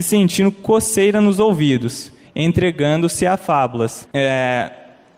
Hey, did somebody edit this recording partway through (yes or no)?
yes